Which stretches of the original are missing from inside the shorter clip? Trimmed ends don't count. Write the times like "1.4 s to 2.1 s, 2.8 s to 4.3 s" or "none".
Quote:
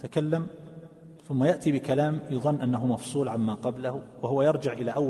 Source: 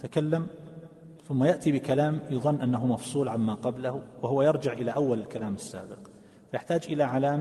none